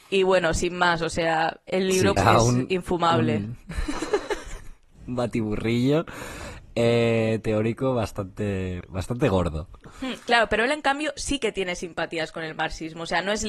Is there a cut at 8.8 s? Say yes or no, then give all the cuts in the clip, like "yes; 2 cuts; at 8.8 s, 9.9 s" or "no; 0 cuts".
yes; 2 cuts; at 2.2 s, 8.8 s